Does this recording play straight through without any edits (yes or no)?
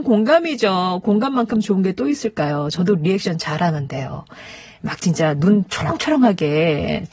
yes